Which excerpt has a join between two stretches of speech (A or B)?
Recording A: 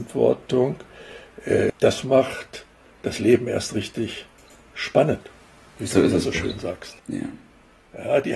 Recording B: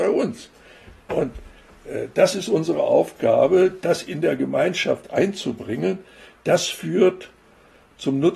A